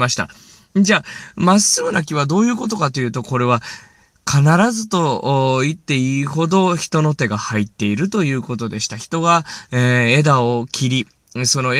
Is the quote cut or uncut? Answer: uncut